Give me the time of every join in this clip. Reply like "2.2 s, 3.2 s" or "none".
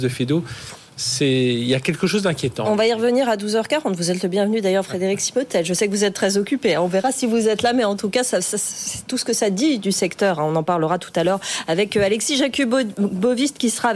none